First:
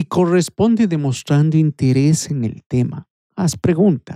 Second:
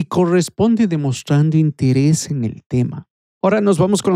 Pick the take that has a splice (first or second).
second